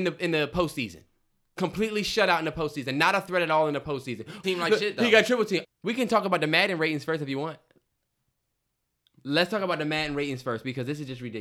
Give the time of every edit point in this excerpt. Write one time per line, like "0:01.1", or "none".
0:04.4
0:05.6